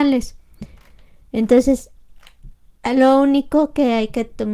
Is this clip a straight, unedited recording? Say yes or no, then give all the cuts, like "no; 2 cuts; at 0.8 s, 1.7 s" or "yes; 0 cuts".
yes; 0 cuts